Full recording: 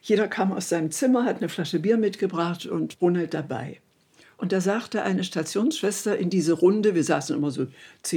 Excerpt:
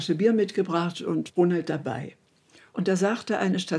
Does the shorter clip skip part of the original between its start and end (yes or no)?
no